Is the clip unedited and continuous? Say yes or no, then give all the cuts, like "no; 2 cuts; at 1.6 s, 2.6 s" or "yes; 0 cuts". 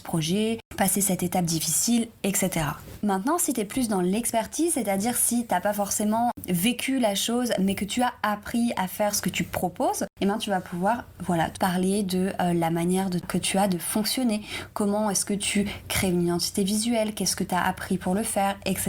no; 2 cuts; at 3.0 s, 11.5 s